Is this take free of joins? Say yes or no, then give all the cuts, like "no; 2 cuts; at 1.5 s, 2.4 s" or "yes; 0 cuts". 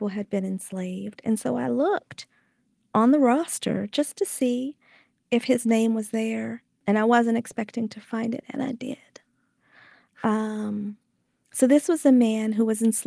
yes; 0 cuts